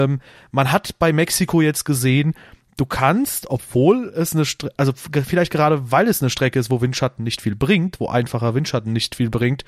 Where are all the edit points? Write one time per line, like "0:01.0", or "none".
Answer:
none